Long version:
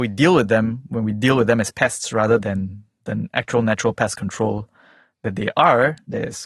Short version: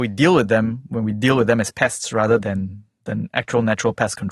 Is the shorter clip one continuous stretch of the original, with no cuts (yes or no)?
yes